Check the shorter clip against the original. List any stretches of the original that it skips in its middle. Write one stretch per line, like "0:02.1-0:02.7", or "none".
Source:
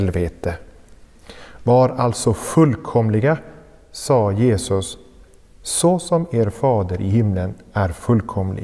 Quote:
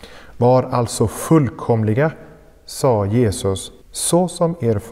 0:05.1-0:05.5

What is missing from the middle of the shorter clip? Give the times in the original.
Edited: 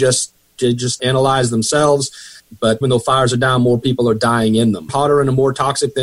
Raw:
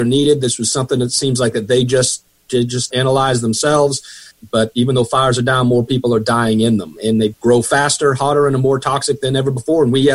0:04.7-0:04.9
0:06.9-0:08.1

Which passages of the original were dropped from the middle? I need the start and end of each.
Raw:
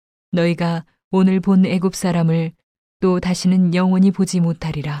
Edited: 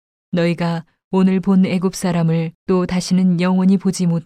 0:02.5-0:02.9

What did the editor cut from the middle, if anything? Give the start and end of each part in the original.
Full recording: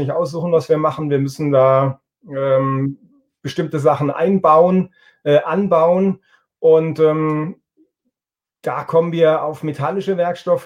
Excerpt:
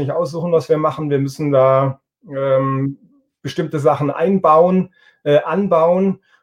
none

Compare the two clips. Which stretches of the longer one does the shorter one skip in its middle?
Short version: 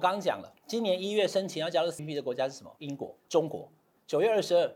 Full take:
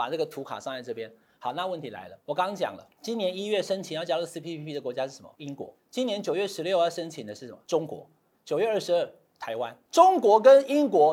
0:04.3-0:04.6
0:05.8-0:07.6

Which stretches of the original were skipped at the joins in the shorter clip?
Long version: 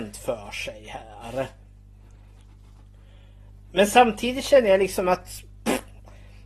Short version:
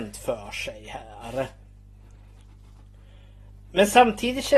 none

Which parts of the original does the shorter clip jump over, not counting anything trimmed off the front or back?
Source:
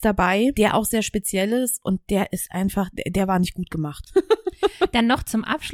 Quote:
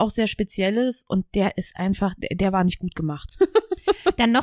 none

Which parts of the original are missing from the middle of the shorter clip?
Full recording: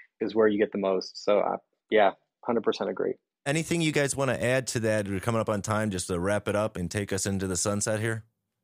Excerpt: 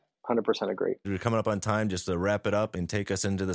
0:03.2-0:05.1

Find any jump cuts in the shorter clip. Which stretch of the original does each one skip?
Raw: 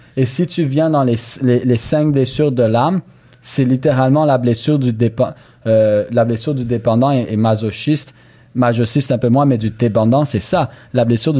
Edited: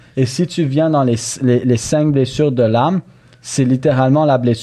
none

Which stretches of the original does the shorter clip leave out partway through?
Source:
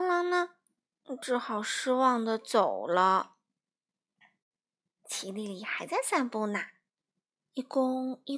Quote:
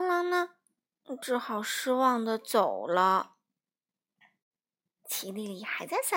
none

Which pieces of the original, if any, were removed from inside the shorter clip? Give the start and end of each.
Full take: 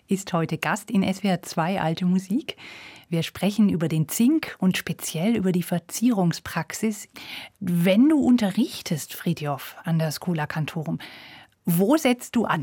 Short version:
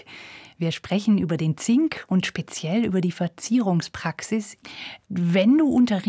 none

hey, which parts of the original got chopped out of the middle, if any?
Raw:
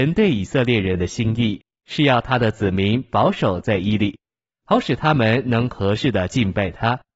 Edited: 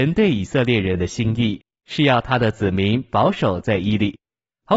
none

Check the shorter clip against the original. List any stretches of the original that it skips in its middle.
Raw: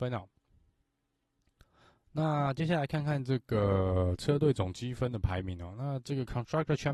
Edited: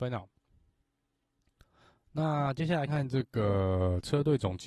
0:02.9-0:03.0

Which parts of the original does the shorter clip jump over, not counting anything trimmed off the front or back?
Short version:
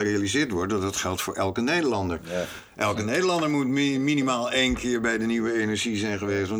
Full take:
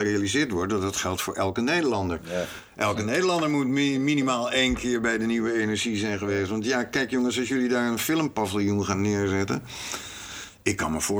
none

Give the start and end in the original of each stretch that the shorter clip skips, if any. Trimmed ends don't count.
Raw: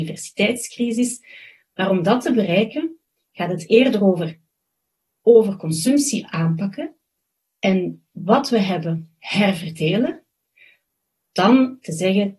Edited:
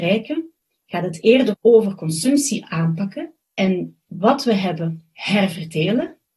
0:04.0-0:05.1
0:07.0-0:07.5

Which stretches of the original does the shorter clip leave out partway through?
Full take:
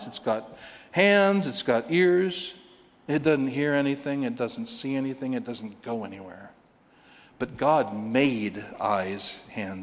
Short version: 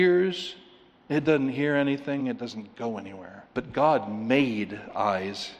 0:04.2-0:05.3
0:06.6-0:07.4

